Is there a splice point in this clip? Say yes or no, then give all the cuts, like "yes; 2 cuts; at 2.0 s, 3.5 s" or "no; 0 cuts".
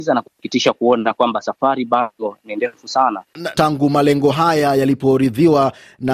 yes; 1 cut; at 3.5 s